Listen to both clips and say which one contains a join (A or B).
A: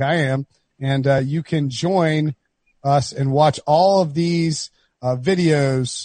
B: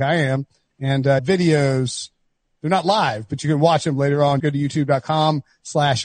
B